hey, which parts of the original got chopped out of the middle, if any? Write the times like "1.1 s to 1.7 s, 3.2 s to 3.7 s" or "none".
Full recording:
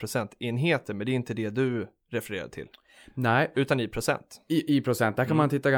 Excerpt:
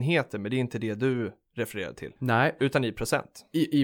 2.7 s to 3.1 s